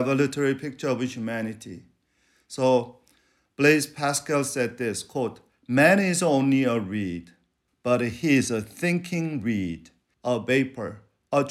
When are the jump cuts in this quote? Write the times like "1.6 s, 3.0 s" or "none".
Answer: 7.7 s, 10.1 s